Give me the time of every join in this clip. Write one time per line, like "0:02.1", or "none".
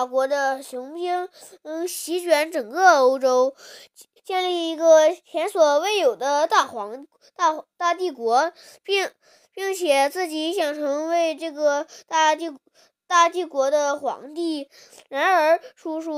0:04.2